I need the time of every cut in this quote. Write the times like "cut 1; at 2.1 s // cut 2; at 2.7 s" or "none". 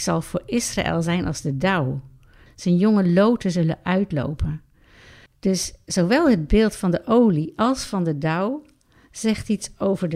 cut 1; at 2.5 s // cut 2; at 5.3 s

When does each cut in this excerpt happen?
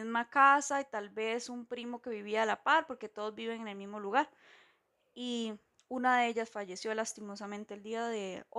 none

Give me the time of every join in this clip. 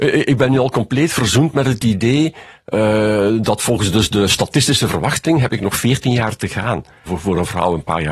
cut 1; at 7.1 s

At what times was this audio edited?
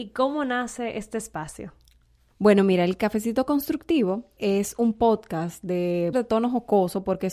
cut 1; at 4.4 s // cut 2; at 6.1 s

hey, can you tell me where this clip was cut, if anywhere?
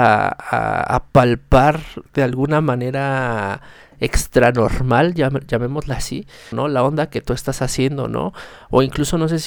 cut 1; at 6.5 s

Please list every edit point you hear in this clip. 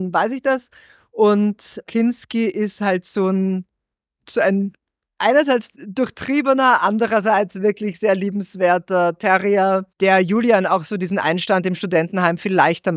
cut 1; at 5.8 s // cut 2; at 9.9 s

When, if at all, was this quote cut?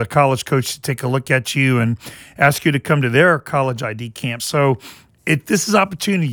none

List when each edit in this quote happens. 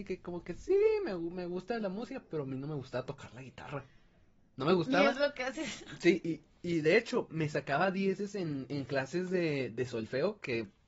cut 1; at 6.2 s

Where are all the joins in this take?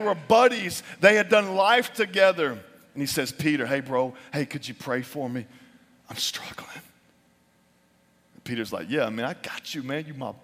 none

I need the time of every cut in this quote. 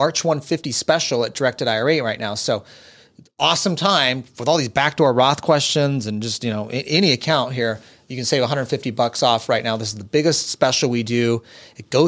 none

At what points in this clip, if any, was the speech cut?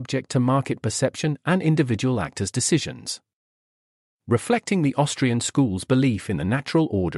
none

